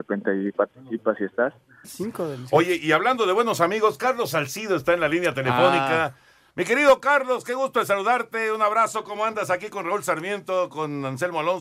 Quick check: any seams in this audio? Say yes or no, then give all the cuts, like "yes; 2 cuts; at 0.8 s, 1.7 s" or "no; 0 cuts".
yes; 1 cut; at 1.8 s